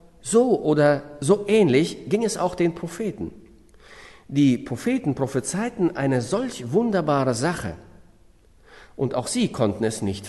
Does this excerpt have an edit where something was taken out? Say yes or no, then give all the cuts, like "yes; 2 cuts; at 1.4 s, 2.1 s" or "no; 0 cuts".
no; 0 cuts